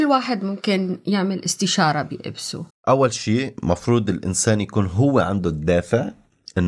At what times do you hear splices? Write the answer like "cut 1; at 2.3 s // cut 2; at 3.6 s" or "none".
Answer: cut 1; at 2.7 s

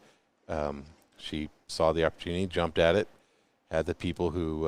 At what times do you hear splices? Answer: none

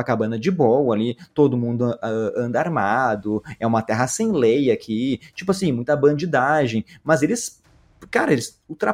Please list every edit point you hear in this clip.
none

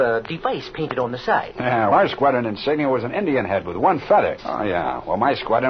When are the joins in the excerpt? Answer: cut 1; at 1.9 s // cut 2; at 4.4 s

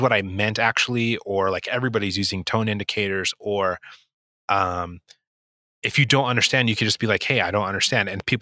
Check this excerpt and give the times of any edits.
none

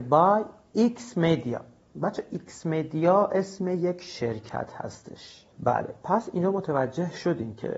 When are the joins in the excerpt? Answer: cut 1; at 5.5 s

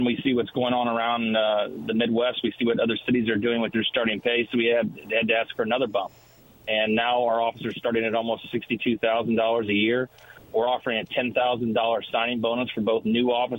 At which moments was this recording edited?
none

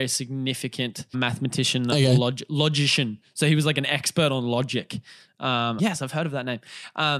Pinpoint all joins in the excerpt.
cut 1; at 1.1 s // cut 2; at 5.8 s

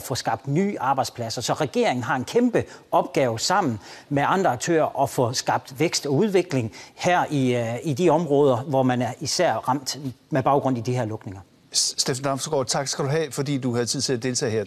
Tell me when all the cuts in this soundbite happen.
none

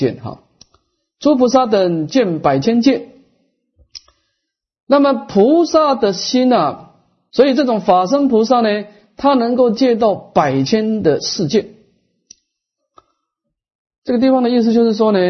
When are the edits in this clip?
cut 1; at 7.3 s

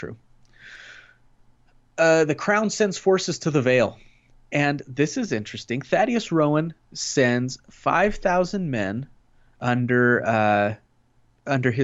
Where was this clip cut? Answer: none

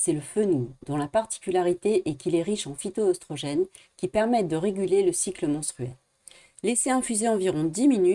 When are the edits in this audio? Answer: cut 1; at 6.6 s

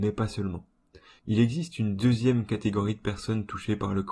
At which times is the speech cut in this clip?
cut 1; at 1.2 s

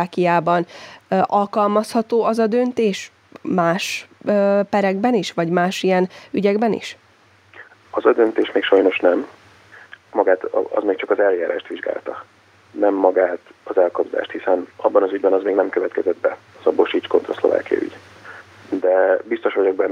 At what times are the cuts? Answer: cut 1; at 10.1 s // cut 2; at 16.5 s

